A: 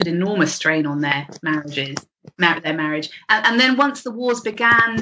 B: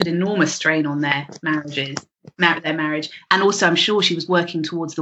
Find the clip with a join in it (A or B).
B